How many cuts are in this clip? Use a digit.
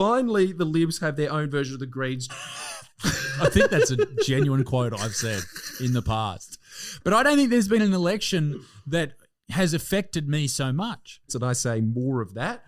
2